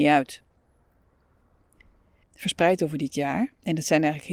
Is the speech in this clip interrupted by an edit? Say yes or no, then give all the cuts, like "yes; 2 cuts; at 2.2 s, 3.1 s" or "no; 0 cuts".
yes; 1 cut; at 2.2 s